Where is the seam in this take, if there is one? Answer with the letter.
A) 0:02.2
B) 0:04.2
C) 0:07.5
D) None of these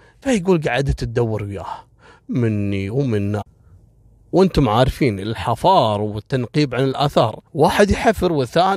C